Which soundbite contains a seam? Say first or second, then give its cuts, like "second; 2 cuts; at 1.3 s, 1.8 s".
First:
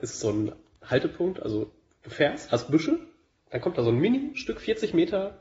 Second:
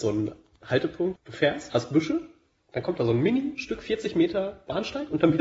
second; 1 cut; at 1.2 s